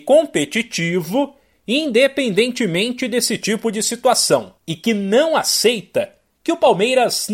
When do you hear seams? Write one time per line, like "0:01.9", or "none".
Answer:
0:04.6